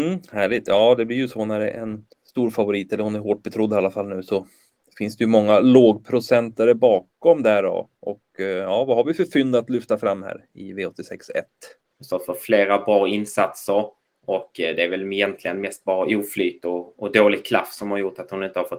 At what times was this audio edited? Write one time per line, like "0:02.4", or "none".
0:02.1
0:11.9